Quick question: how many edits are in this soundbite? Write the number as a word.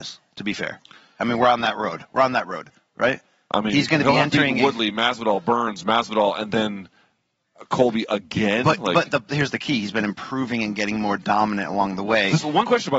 zero